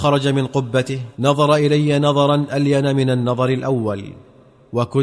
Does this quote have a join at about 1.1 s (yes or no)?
yes